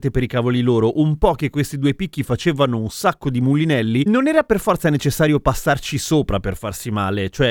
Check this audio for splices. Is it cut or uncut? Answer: uncut